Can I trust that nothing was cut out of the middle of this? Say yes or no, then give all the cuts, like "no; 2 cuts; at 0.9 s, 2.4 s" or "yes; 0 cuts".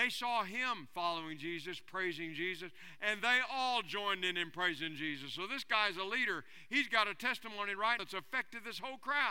no; 1 cut; at 8.0 s